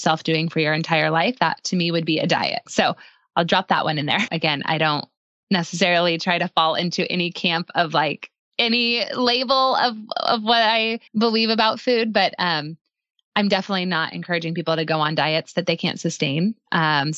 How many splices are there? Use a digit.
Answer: 3